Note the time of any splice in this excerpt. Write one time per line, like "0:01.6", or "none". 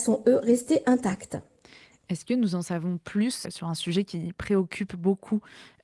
0:03.4